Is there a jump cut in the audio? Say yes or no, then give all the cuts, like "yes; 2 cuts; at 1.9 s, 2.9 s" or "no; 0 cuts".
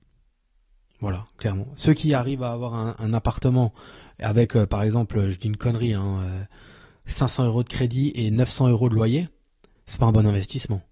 yes; 1 cut; at 9.8 s